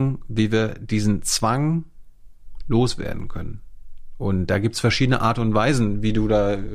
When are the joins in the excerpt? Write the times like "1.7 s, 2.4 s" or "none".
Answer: none